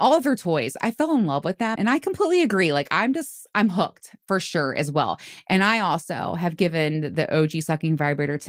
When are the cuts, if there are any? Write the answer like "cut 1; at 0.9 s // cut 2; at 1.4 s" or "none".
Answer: cut 1; at 1.8 s